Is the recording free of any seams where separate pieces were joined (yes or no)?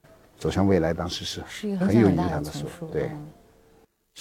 no